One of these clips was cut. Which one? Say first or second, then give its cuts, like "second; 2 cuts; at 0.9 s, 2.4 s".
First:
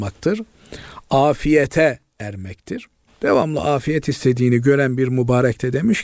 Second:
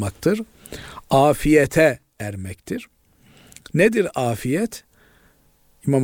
first; 1 cut; at 3.1 s